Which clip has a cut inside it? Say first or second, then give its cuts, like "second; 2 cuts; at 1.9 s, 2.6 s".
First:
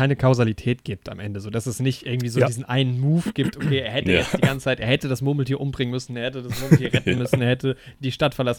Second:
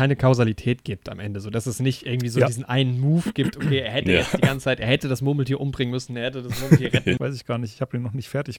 second; 1 cut; at 7.2 s